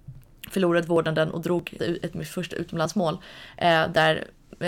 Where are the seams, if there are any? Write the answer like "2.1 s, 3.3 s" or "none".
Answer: 1.8 s